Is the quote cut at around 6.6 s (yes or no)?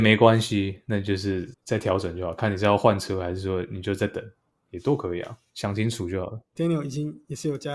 yes